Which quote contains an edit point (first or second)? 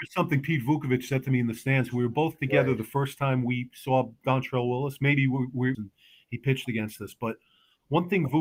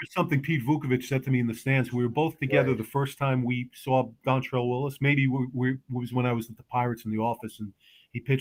first